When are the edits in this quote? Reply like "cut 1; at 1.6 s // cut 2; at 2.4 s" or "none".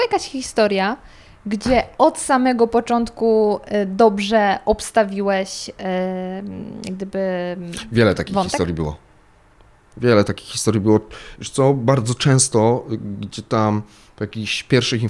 none